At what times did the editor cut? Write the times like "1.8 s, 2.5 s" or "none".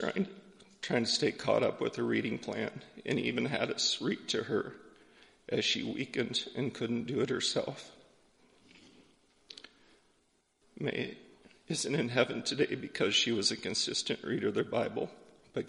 none